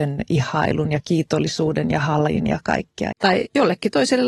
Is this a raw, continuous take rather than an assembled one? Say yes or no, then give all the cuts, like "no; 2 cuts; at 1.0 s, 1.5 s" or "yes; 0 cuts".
no; 1 cut; at 3.1 s